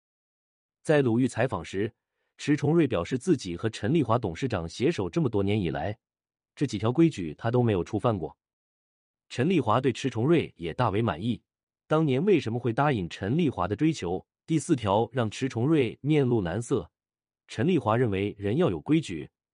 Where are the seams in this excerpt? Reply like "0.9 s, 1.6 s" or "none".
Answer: 11.7 s, 14.4 s